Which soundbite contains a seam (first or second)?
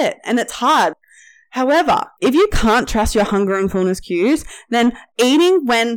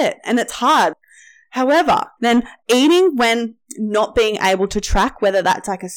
second